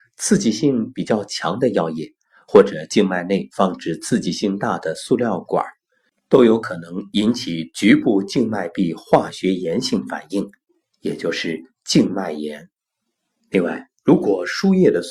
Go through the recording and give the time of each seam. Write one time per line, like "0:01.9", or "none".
0:13.4